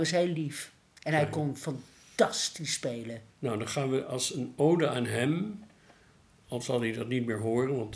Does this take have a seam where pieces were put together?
yes; 1 cut; at 3.3 s

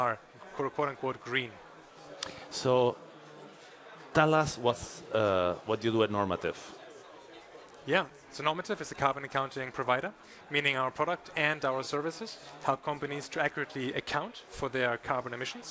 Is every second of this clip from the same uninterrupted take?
yes; 0 cuts

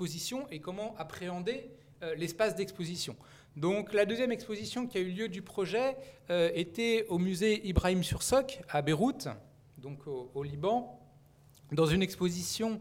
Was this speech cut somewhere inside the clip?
no; 0 cuts

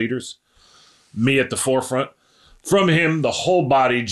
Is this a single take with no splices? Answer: yes; 0 cuts

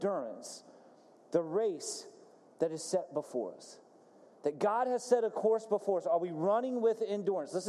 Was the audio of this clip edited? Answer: no; 0 cuts

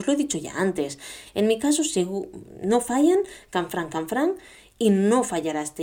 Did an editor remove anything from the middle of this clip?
no; 0 cuts

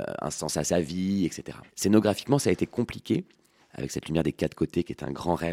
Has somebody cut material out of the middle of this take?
yes; 2 cuts; at 1.7 s, 3.6 s

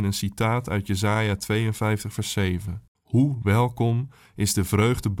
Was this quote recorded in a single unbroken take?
no; 1 cut; at 2.9 s

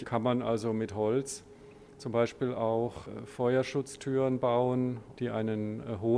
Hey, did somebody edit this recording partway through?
yes; 1 cut; at 5.1 s

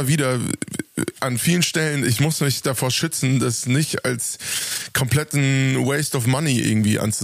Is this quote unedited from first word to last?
yes; 0 cuts

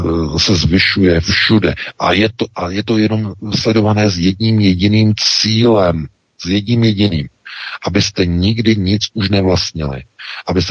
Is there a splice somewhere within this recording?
no; 0 cuts

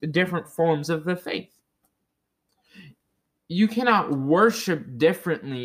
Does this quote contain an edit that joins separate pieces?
no; 0 cuts

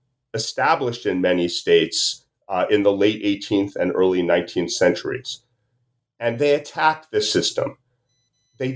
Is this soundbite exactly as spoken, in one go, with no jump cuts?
yes; 0 cuts

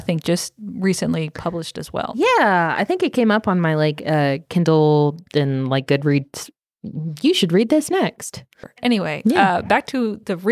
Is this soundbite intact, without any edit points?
yes; 0 cuts

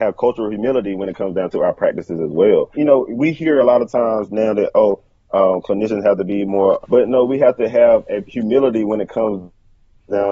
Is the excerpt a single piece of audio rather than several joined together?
no; 2 cuts; at 2.7 s, 6.8 s

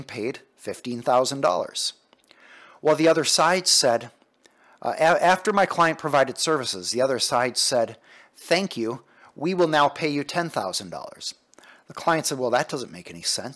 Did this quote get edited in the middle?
no; 0 cuts

